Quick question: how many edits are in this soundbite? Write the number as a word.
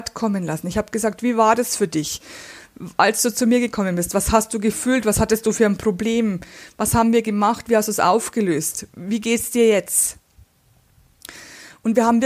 zero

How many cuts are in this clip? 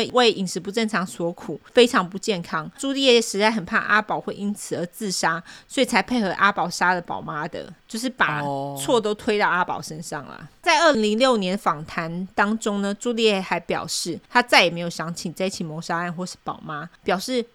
one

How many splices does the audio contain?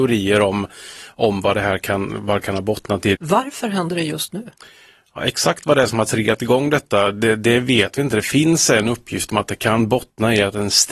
one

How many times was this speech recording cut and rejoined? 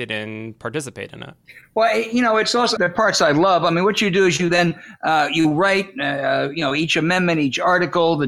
one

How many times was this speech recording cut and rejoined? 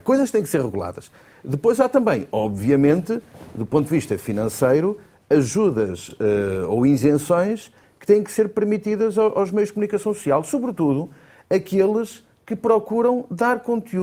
zero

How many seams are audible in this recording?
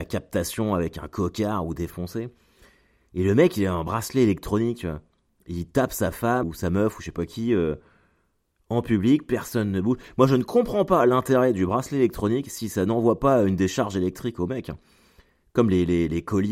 one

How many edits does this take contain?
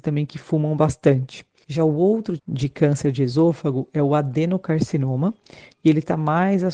one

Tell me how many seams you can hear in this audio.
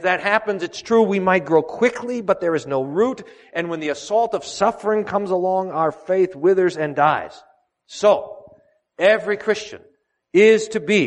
zero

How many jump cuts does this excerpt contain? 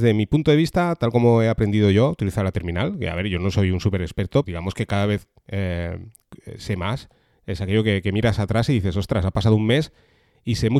one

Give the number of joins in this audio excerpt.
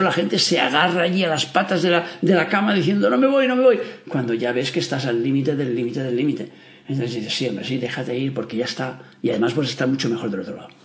zero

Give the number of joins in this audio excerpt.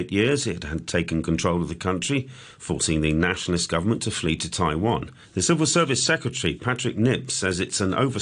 one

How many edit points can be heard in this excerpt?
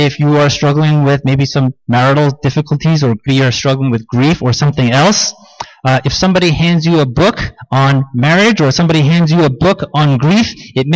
one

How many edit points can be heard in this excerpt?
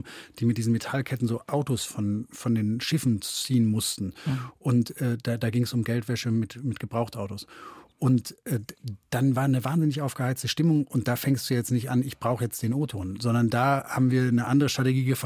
zero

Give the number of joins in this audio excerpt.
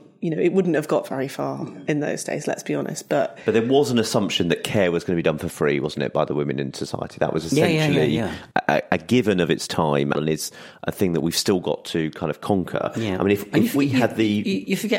two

